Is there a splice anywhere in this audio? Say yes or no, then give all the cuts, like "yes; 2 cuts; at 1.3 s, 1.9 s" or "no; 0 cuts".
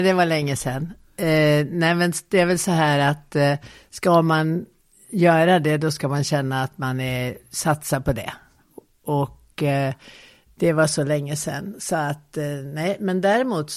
no; 0 cuts